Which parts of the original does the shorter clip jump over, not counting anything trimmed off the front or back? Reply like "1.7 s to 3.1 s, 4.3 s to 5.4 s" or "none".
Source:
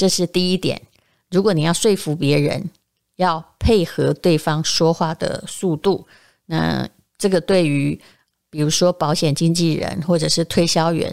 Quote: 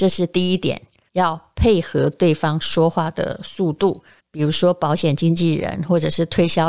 1.1 s to 3.1 s, 6.2 s to 8.4 s